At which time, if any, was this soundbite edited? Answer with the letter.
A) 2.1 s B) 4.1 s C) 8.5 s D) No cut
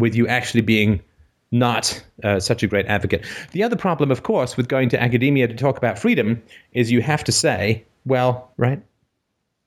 C